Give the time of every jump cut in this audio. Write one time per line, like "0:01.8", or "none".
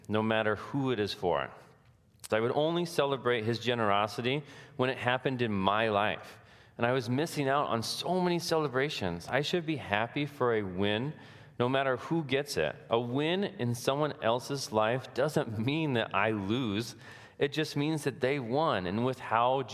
0:02.3